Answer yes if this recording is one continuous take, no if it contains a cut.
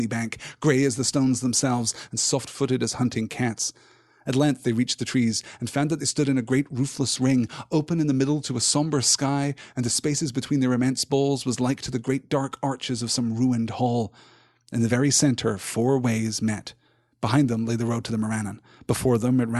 yes